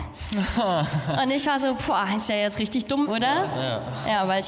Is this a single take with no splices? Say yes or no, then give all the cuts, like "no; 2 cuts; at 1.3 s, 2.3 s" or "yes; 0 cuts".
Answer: no; 1 cut; at 3.1 s